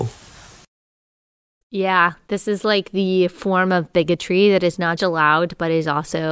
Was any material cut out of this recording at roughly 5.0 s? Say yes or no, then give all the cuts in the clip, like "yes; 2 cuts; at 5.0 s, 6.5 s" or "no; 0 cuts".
yes; 2 cuts; at 1.6 s, 5.0 s